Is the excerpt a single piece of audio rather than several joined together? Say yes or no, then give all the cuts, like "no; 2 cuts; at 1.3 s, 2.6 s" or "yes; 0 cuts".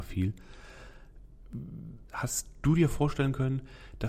no; 1 cut; at 2.1 s